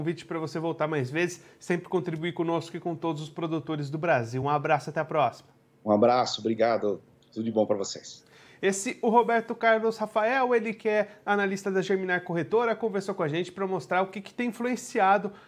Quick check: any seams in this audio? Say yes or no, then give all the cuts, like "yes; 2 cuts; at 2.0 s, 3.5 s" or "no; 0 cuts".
no; 0 cuts